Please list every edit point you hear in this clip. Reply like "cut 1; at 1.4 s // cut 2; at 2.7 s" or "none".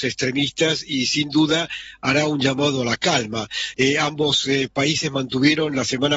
cut 1; at 3.7 s